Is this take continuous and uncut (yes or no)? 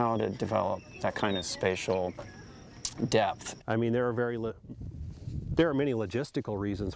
no